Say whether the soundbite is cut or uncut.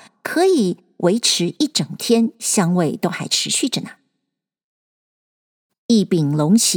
cut